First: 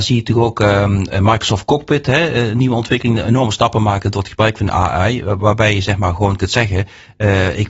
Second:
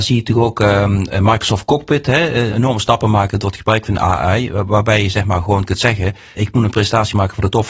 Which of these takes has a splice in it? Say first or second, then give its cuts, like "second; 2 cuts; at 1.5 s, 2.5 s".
second; 2 cuts; at 2.5 s, 6.4 s